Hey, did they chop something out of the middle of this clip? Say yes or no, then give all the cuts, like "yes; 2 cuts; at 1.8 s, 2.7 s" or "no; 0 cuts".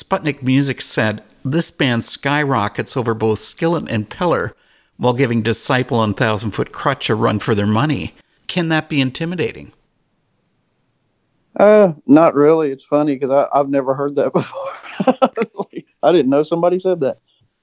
yes; 1 cut; at 8.4 s